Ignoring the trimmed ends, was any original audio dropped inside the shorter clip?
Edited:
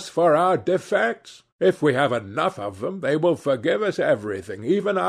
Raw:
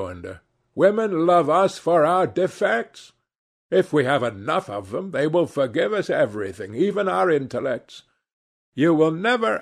yes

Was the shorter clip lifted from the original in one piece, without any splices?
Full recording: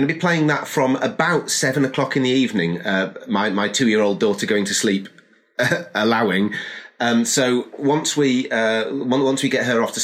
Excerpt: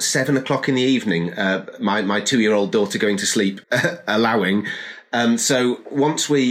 no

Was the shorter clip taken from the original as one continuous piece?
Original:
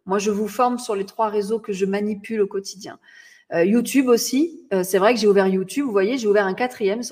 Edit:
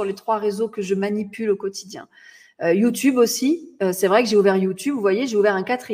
yes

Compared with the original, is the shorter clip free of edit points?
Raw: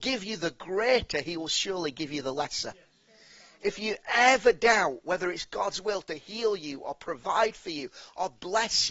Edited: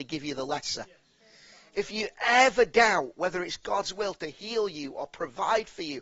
yes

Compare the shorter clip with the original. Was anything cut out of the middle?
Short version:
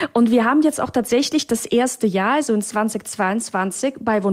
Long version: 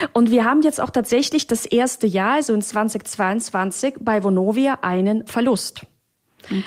no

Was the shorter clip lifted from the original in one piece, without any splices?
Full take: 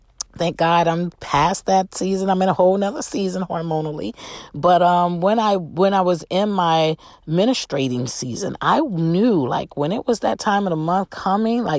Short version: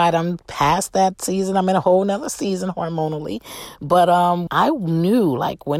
no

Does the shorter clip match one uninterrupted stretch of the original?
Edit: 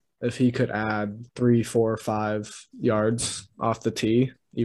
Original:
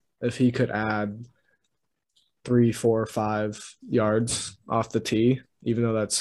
no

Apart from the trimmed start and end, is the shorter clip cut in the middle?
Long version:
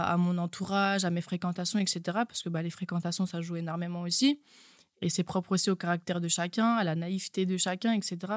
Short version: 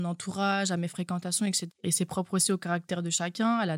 yes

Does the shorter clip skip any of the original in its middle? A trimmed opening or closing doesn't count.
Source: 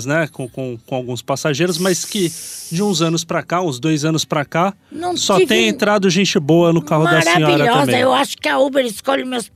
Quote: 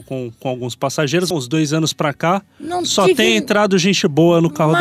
yes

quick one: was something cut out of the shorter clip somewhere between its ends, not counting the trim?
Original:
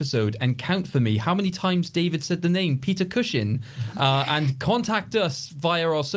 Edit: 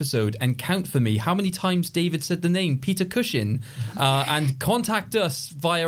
no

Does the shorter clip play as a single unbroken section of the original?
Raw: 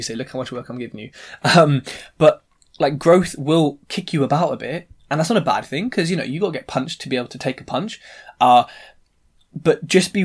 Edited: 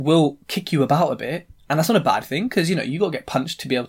yes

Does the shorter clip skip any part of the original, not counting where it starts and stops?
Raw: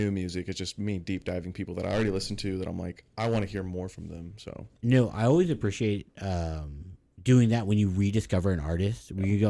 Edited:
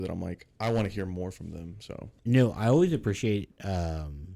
no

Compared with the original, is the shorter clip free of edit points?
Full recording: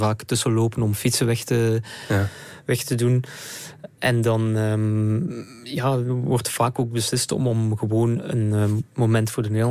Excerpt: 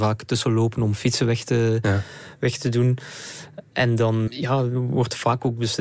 no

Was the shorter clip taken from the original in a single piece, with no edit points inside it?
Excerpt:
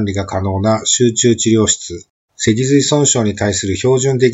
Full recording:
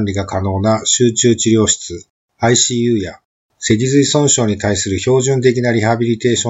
no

